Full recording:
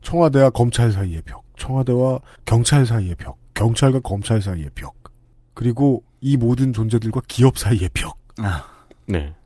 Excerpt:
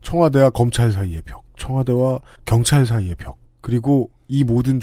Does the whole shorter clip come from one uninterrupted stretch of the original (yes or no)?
no